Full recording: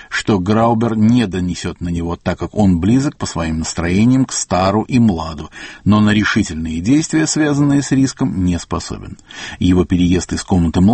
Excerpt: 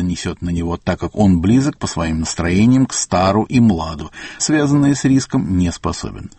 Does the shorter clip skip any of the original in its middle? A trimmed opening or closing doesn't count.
yes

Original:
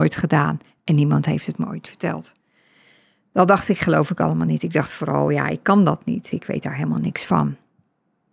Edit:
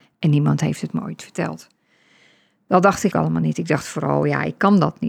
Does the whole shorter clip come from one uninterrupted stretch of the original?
no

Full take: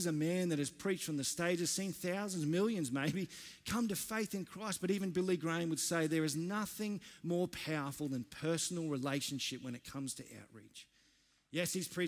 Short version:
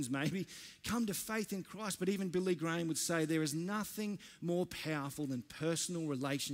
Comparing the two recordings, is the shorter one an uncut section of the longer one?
yes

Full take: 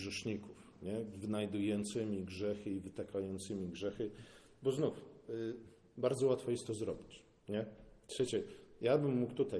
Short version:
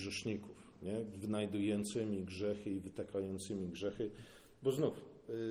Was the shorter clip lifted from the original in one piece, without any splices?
yes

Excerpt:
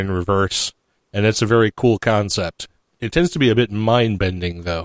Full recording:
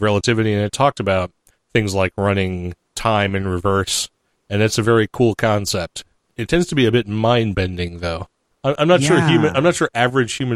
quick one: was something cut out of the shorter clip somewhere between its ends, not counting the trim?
no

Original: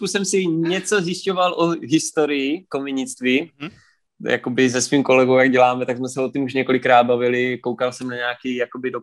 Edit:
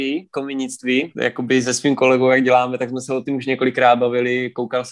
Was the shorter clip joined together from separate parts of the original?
yes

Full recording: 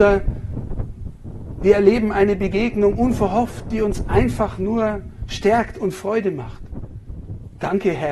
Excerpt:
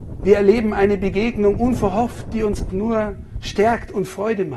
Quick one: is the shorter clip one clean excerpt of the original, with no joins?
no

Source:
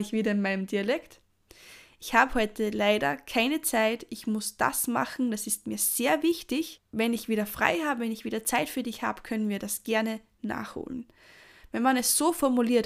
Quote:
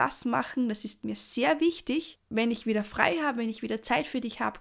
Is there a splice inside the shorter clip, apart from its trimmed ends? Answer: no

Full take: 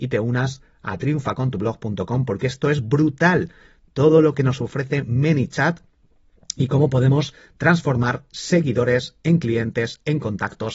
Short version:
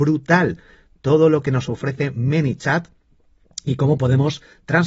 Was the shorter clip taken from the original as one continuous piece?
yes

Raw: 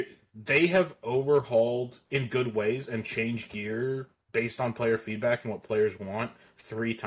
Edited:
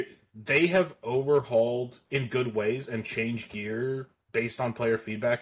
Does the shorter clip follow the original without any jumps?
yes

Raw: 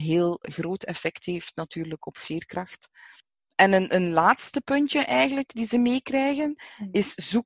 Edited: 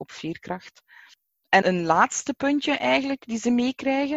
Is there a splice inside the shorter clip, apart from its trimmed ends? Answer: yes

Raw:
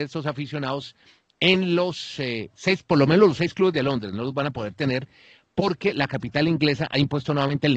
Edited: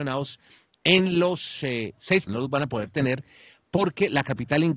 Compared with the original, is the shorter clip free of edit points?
no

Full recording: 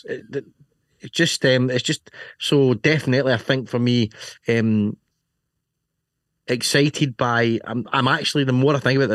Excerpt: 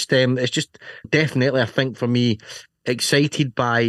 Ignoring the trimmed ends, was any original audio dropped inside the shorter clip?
yes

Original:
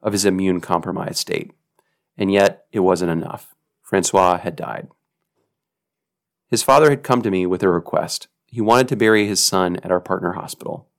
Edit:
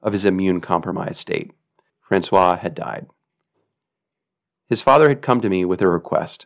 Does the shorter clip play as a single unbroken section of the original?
no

